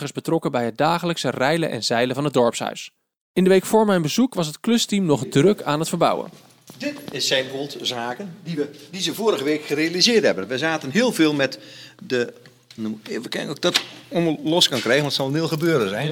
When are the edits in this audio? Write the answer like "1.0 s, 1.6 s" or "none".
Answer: none